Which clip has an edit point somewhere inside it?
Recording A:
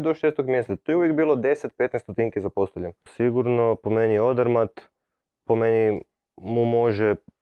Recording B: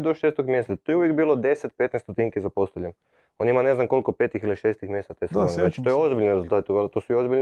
A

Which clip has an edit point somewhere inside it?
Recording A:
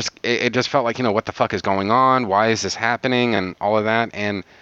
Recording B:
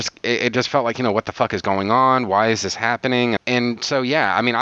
B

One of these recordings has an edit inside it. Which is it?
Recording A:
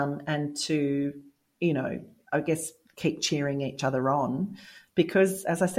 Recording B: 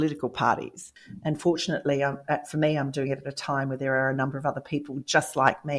B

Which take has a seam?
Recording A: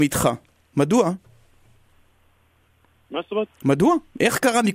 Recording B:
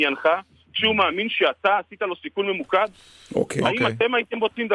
A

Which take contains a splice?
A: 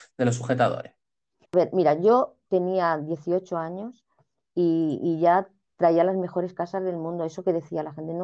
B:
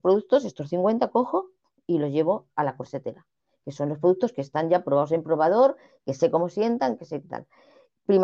A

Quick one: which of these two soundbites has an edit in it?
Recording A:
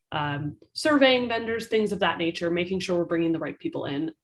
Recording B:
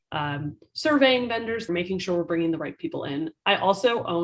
B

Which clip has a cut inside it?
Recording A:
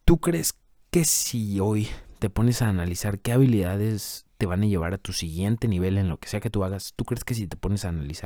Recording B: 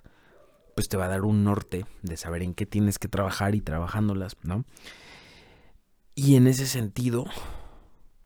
B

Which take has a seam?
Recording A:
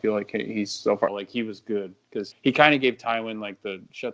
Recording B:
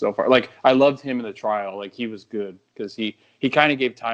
A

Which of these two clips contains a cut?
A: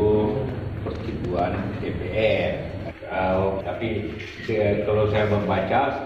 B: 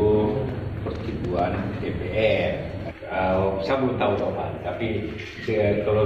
A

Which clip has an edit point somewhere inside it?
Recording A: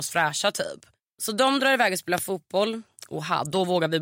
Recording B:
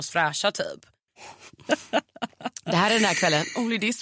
B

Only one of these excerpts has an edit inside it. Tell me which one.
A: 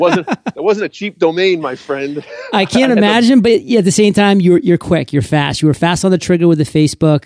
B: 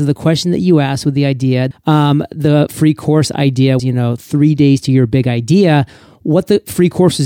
B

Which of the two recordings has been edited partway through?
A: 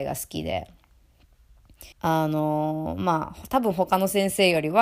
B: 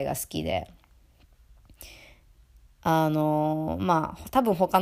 A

